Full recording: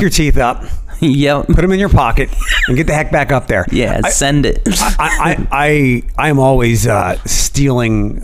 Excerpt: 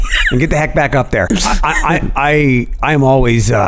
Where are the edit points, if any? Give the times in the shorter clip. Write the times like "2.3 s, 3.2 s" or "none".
1.3 s